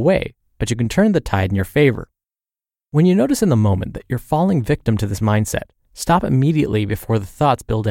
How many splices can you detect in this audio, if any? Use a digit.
0